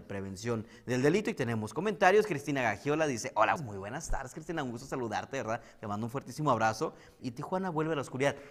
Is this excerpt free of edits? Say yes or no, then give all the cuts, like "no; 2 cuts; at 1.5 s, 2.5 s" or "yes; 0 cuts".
no; 2 cuts; at 3.6 s, 7.2 s